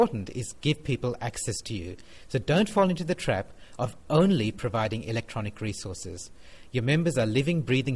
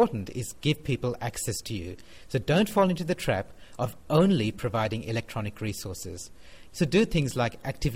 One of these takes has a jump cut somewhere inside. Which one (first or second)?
second